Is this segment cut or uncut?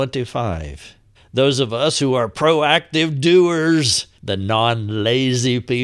cut